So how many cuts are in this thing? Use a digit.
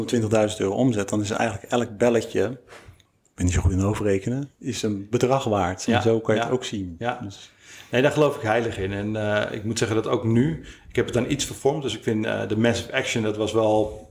1